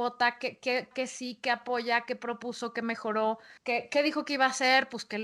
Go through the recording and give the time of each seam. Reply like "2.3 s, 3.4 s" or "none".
0.9 s, 3.6 s